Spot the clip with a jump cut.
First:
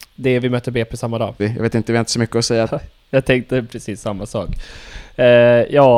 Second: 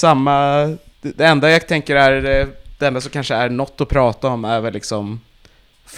first; 2 cuts; at 1.4 s, 2.7 s

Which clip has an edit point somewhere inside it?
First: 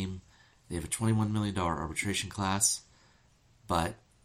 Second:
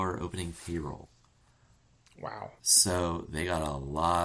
second; 1 cut; at 2.6 s

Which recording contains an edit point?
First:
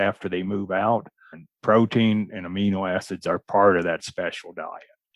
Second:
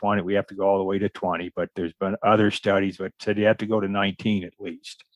first; 1 cut; at 1.3 s

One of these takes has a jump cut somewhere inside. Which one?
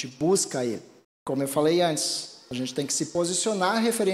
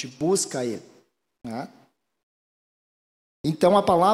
first; 1 cut; at 1.0 s

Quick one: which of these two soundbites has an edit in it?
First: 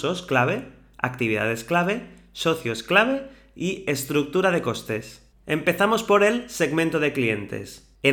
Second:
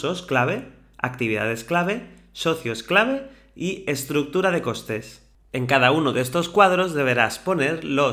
first; 1 cut; at 5.3 s

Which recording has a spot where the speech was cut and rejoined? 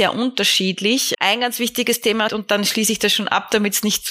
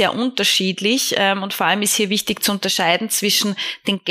first; 2 cuts; at 1.1 s, 2.3 s

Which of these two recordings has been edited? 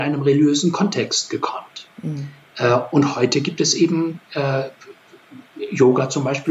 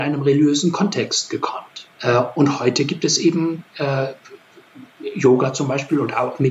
second; 1 cut; at 1.9 s

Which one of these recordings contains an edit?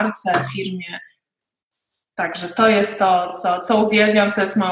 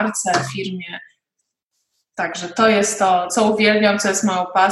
second; 1 cut; at 3.3 s

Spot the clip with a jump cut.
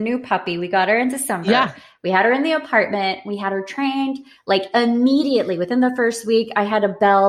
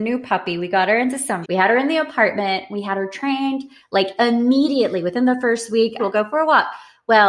second; 2 cuts; at 1.4 s, 6.0 s

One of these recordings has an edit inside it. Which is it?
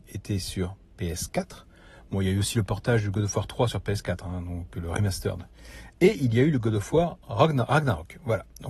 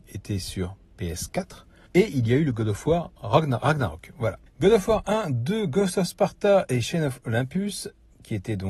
second; 2 cuts; at 1.9 s, 4.5 s

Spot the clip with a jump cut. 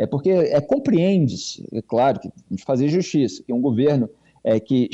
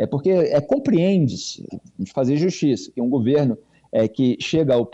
second; 1 cut; at 1.7 s

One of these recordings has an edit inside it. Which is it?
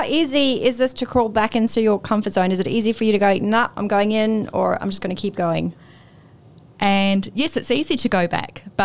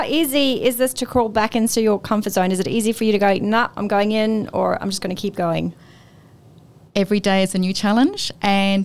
first; 1 cut; at 6.8 s

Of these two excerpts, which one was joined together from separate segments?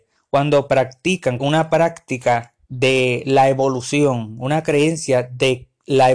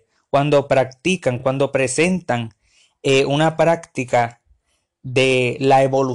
first; 2 cuts; at 1.4 s, 2.6 s

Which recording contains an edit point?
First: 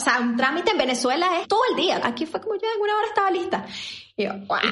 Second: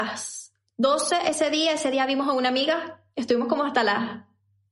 first; 1 cut; at 2.0 s

